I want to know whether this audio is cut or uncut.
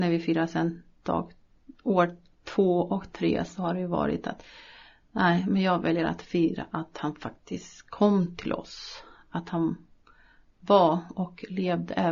uncut